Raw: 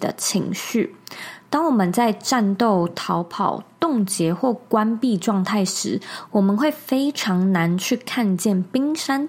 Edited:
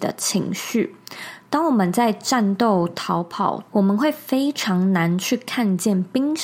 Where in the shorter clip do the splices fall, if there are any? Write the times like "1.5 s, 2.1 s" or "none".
3.7 s